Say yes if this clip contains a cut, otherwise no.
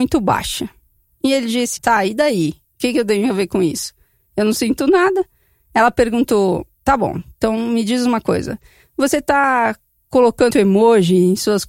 yes